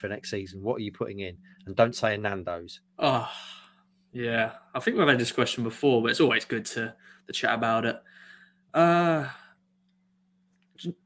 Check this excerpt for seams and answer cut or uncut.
cut